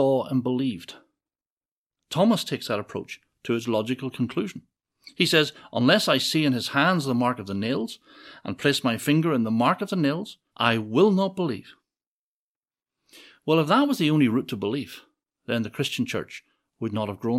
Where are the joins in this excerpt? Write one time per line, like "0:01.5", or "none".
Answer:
0:10.5